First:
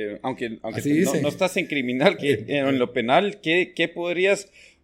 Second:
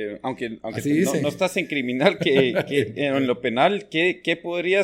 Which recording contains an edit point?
first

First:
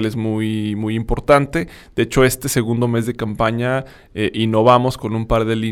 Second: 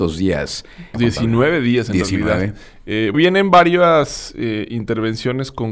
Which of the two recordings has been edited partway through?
second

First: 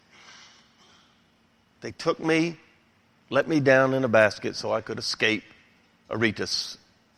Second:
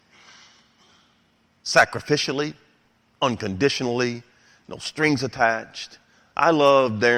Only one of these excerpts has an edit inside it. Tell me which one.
second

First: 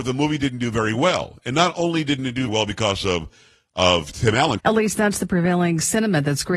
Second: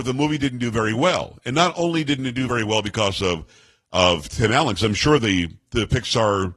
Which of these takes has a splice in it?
first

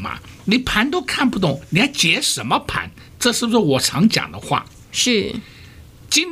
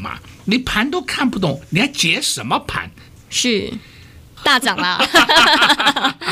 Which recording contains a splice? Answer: second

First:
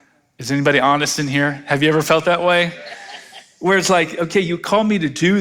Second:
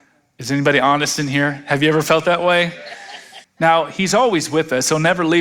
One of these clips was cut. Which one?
second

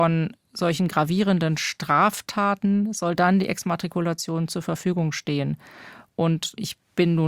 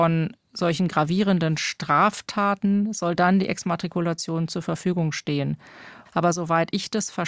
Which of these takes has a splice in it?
second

